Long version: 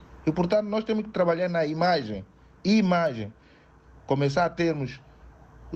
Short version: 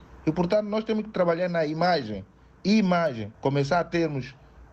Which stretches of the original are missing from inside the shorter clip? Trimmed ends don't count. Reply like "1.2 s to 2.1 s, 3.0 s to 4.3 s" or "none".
3.3 s to 4.0 s